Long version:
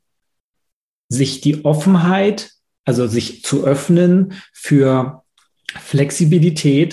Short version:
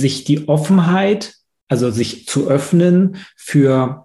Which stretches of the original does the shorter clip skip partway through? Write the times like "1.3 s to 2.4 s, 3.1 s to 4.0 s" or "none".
none